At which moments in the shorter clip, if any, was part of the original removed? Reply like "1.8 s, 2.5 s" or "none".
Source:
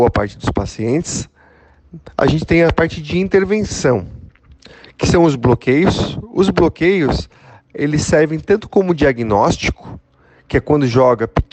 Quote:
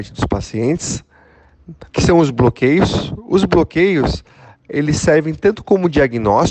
1.9 s

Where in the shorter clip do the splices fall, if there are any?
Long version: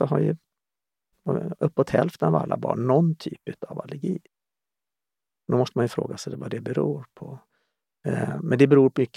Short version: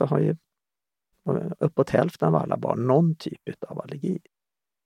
none

